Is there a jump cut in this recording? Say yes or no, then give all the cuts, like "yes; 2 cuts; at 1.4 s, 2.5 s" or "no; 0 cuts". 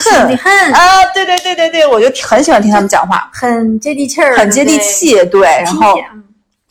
no; 0 cuts